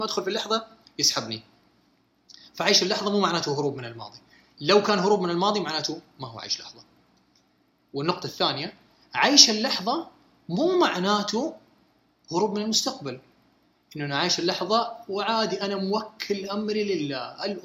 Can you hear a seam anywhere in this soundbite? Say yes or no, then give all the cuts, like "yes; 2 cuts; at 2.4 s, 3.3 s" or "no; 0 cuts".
no; 0 cuts